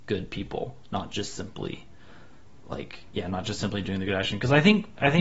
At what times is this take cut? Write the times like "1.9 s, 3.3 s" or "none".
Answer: none